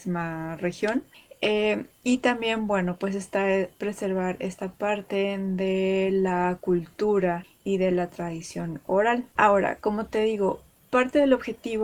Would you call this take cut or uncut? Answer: cut